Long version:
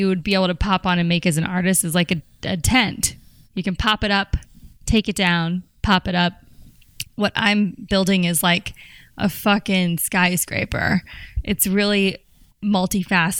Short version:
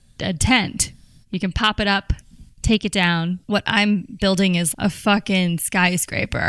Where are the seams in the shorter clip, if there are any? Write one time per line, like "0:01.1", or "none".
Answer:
0:03.4
0:04.7